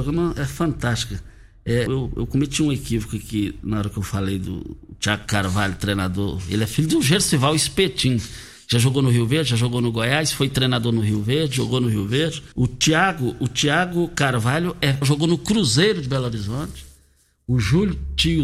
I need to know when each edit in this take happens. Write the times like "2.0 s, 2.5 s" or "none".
1.9 s, 12.5 s, 15.0 s